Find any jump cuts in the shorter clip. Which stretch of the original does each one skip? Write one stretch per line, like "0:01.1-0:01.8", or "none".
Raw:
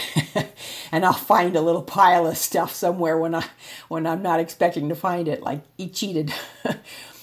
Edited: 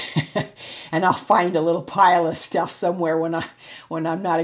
none